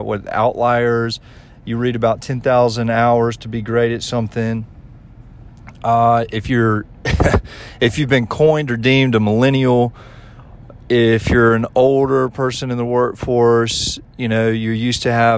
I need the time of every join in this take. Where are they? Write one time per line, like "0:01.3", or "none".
none